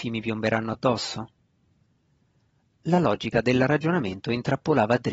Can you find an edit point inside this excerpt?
no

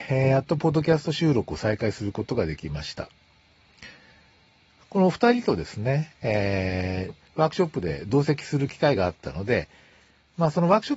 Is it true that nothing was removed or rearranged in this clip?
no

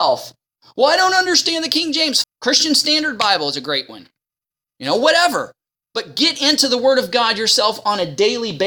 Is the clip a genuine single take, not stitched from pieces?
no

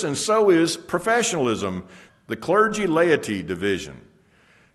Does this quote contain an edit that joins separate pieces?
yes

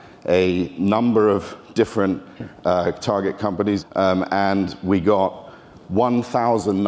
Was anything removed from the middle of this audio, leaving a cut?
no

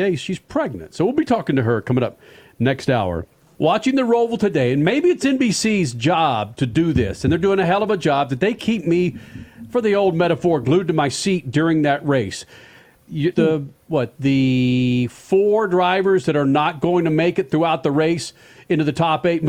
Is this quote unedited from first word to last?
no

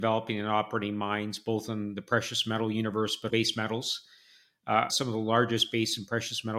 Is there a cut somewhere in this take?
yes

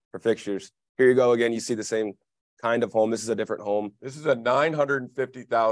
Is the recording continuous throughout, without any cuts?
yes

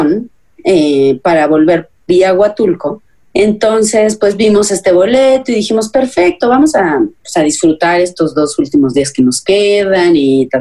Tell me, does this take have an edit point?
no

